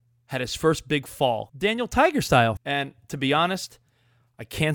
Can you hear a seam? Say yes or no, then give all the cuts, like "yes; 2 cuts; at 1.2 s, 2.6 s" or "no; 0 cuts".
yes; 2 cuts; at 1.5 s, 2.6 s